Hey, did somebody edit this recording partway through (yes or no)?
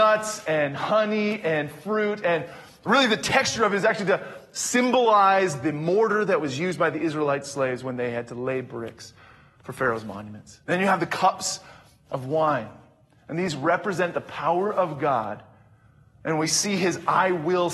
yes